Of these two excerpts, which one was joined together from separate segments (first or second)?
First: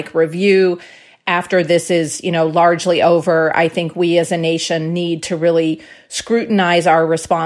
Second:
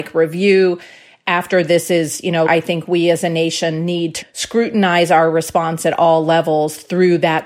second